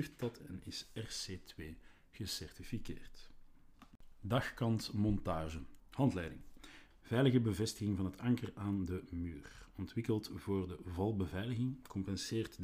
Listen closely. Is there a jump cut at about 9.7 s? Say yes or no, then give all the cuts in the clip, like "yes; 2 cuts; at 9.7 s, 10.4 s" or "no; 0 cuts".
no; 2 cuts; at 5.8 s, 6.9 s